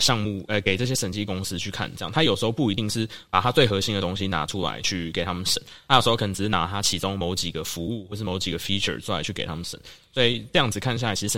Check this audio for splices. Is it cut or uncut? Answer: uncut